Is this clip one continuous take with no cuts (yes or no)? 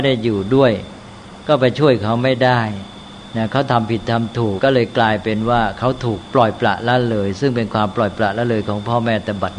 no